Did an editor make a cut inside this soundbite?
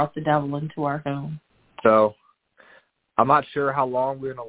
yes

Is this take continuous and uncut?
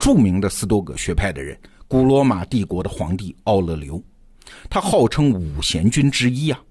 yes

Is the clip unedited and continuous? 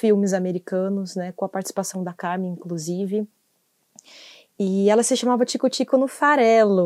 yes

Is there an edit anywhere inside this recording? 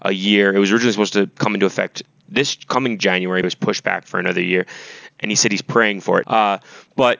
yes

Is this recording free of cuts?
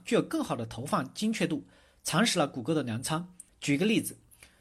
no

